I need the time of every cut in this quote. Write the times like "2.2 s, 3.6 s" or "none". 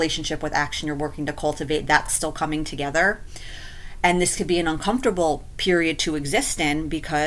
none

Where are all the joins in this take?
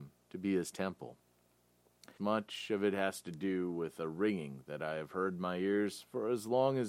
2.2 s

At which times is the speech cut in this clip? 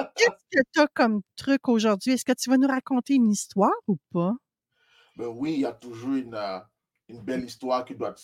none

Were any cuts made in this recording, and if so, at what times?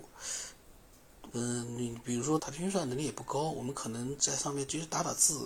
1.3 s, 2.4 s

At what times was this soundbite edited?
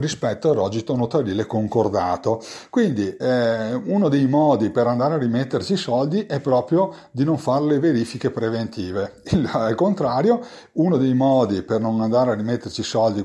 none

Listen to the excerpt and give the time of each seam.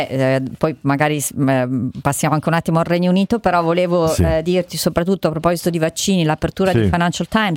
none

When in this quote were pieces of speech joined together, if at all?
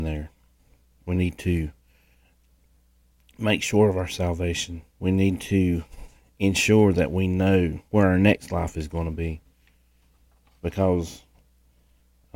1.0 s, 4.9 s, 7.9 s

